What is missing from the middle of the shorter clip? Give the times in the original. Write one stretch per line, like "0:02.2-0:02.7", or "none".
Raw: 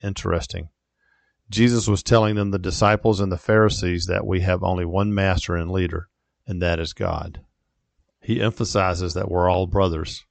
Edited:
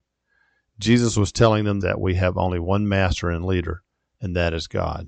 0:02.5-0:04.1